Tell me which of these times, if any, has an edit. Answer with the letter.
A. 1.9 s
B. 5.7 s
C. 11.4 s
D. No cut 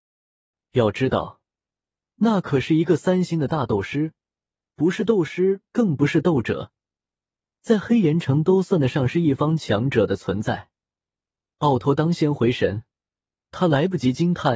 C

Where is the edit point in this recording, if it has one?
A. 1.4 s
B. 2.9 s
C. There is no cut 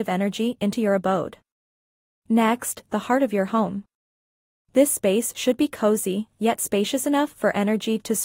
B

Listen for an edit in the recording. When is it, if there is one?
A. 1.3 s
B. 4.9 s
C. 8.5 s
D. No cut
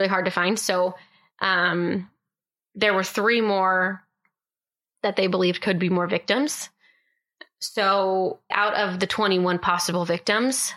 C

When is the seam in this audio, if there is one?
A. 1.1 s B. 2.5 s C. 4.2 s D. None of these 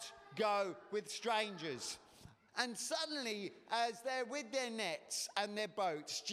B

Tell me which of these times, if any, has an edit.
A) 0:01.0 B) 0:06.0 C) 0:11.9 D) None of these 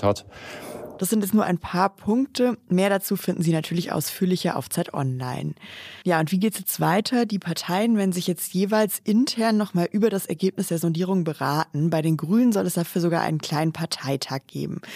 A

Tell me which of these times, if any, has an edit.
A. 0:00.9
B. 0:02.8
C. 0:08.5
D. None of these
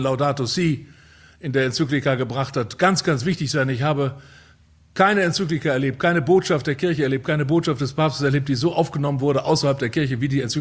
D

